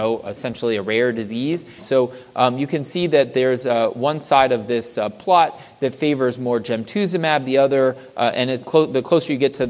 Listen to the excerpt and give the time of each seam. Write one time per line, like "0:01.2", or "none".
0:01.8